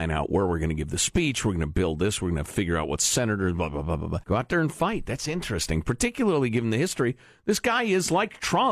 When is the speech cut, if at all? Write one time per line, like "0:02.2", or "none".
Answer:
0:04.2